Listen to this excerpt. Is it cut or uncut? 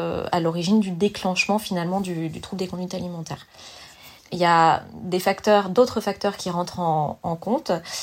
cut